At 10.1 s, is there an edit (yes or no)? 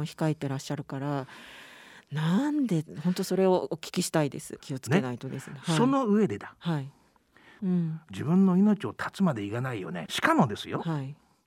yes